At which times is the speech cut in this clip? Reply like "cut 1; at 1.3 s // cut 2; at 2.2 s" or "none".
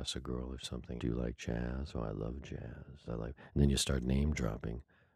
cut 1; at 1.0 s // cut 2; at 3.0 s